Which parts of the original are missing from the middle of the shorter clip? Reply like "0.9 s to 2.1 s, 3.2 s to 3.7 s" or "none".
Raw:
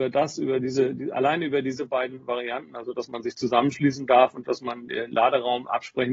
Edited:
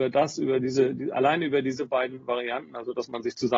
none